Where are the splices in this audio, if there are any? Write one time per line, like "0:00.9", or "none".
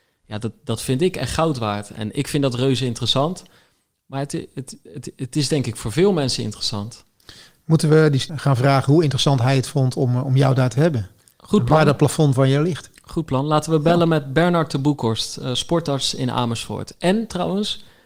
0:08.3